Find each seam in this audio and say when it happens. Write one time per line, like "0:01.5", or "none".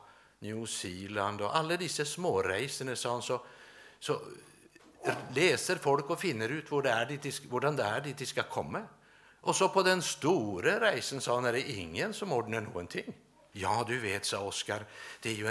0:09.3
0:13.5